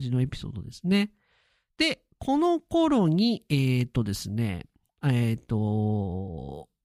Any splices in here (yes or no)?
no